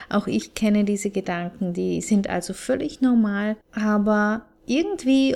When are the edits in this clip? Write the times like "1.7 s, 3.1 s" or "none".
3.6 s